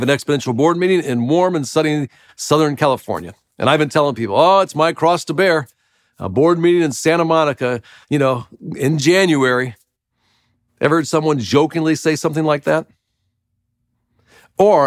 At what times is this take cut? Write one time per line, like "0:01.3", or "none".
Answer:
none